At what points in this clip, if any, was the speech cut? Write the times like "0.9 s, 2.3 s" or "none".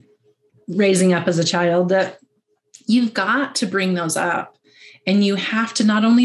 none

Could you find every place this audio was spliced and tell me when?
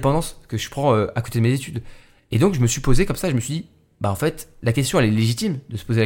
none

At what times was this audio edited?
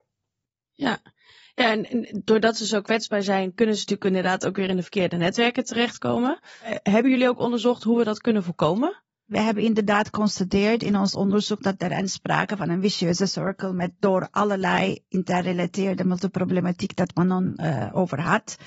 6.6 s

